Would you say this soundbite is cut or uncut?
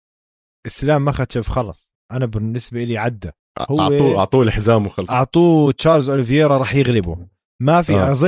cut